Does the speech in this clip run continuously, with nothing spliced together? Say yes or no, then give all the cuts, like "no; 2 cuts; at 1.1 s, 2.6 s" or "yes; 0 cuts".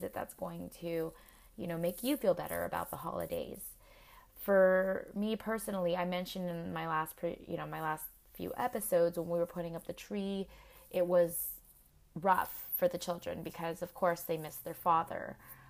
yes; 0 cuts